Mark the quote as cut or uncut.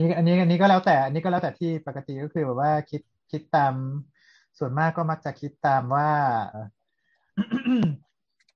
cut